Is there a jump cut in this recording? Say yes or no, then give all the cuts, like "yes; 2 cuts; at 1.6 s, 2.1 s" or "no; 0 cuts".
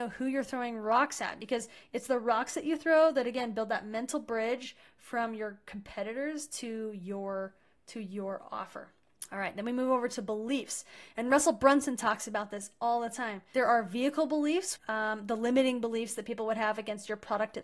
yes; 1 cut; at 14.8 s